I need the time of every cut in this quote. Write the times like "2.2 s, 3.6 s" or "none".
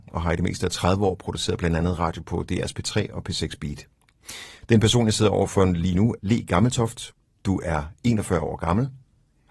6.2 s